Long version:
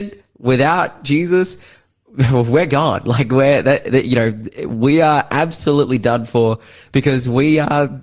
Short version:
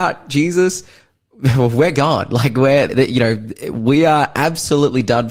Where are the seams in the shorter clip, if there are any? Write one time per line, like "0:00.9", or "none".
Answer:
0:02.9